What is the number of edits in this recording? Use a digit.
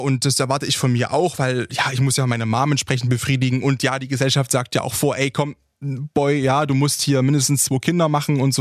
0